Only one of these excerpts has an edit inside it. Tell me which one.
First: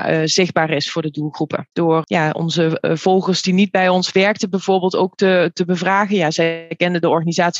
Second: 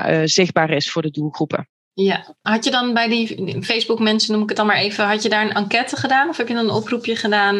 first; 1 cut; at 1.7 s

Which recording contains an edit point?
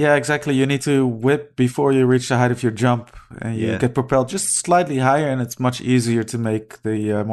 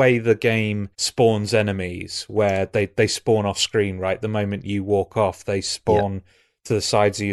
second; 1 cut; at 0.9 s

